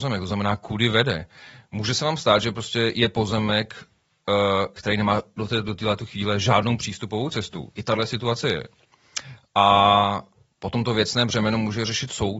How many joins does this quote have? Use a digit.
0